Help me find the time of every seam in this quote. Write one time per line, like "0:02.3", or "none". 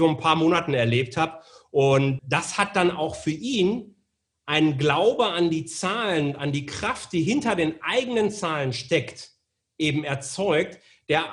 0:02.2